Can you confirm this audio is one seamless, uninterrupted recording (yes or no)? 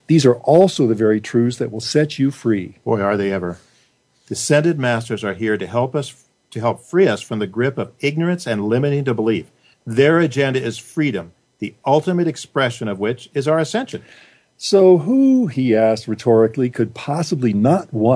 yes